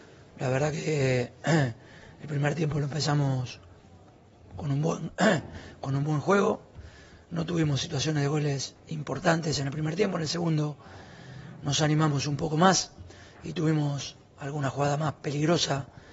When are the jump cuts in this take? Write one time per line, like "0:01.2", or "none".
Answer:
0:08.8